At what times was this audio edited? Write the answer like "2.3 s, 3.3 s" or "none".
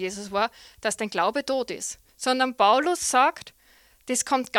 2.1 s